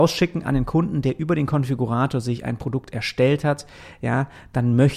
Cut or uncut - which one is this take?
uncut